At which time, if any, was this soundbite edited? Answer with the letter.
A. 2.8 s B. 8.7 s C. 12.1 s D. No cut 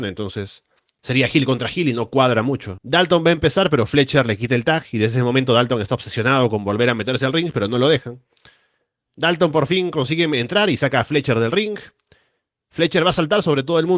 A